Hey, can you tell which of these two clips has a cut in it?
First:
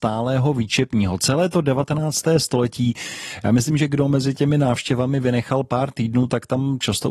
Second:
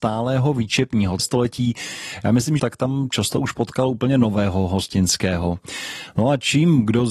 second; 2 cuts; at 1.2 s, 2.6 s

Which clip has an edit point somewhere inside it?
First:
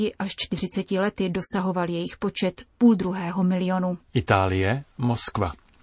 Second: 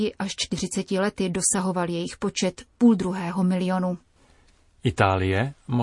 first; 1 cut; at 4.0 s

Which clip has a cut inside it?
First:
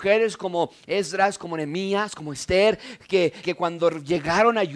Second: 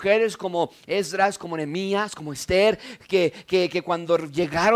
first; 1 cut; at 3.4 s

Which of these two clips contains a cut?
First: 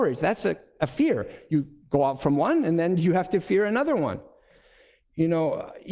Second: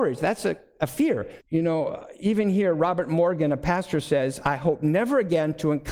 second; 1 cut; at 1.4 s

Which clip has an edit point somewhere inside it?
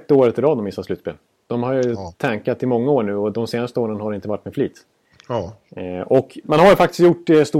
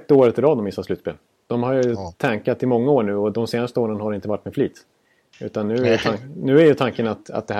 first; 2 cuts; at 5.1 s, 6.4 s

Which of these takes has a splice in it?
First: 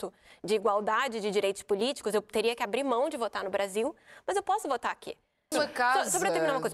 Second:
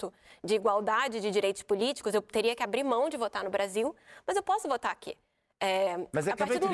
first; 1 cut; at 5.5 s

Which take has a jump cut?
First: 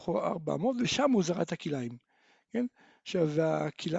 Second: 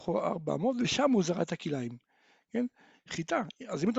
second; 1 cut; at 2.9 s

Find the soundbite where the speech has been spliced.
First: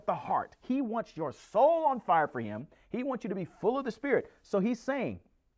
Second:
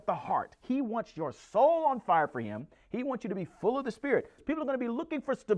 second; 1 cut; at 4.4 s

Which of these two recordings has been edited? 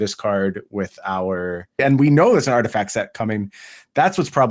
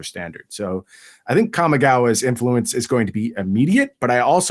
first; 1 cut; at 1.8 s

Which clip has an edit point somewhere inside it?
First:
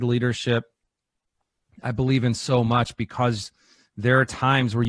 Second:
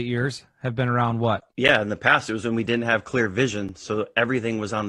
second; 1 cut; at 1.5 s

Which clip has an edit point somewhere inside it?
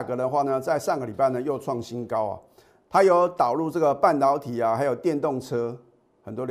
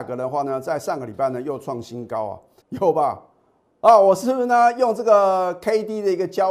second; 1 cut; at 2.6 s

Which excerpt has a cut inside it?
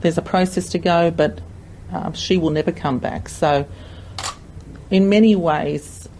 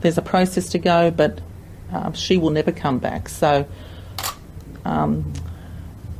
second; 1 cut; at 4.8 s

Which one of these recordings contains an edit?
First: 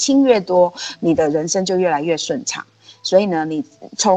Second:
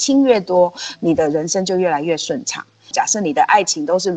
second; 1 cut; at 2.9 s

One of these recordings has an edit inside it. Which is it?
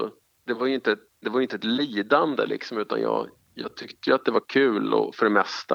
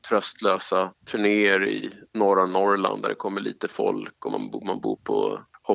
second; 1 cut; at 1.0 s

